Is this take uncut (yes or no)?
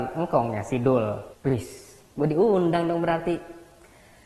no